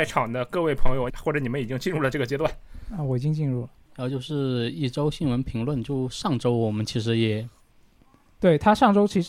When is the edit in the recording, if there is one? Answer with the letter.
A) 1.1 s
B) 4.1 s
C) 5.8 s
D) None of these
A